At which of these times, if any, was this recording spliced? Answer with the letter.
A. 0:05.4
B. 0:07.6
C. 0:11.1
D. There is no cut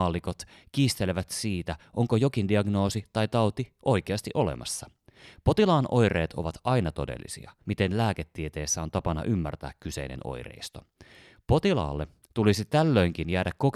B